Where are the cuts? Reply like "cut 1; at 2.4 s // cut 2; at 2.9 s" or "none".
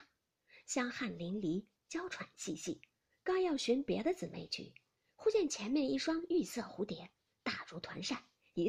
cut 1; at 3.1 s